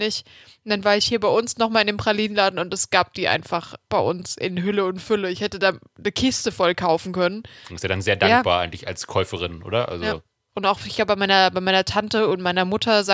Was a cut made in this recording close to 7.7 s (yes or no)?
yes